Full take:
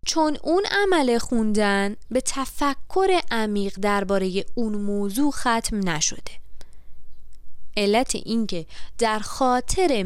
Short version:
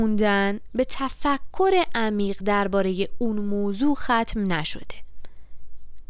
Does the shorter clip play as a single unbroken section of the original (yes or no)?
yes